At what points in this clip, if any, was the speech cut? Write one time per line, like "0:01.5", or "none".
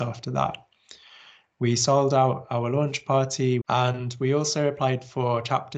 0:03.6